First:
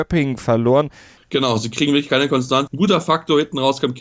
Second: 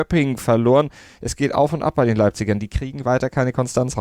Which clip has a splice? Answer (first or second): first